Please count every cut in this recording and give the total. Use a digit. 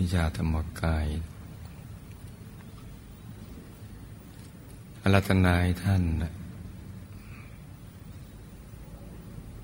0